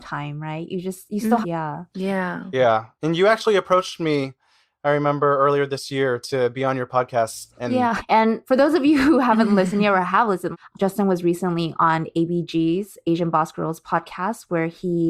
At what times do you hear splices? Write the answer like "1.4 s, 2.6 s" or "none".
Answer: 1.4 s, 8.0 s